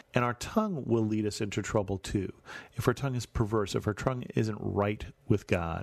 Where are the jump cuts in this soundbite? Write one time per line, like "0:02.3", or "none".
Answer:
none